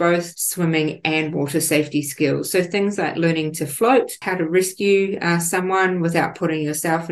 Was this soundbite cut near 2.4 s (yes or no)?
no